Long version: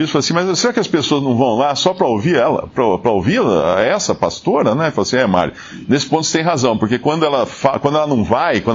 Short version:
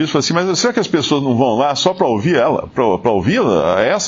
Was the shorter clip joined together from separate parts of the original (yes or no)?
no